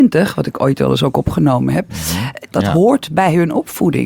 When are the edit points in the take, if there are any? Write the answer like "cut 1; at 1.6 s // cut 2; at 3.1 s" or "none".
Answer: cut 1; at 2.5 s